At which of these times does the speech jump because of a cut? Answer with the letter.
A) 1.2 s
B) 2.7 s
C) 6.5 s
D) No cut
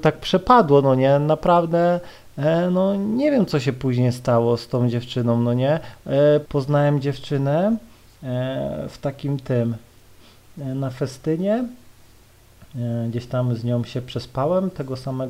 C